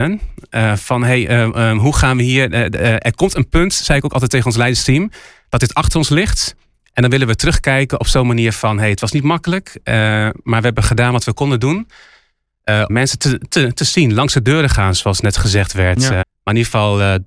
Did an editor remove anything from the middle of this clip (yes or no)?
yes